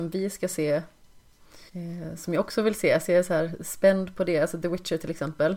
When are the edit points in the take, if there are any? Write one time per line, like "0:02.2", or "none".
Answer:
0:01.7